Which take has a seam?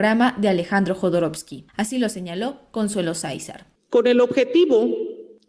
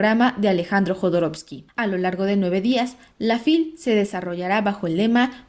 first; 1 cut; at 1.7 s

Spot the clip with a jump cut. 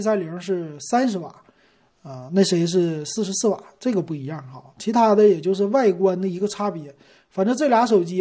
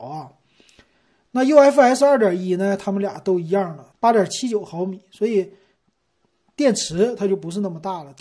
second; 1 cut; at 3.9 s

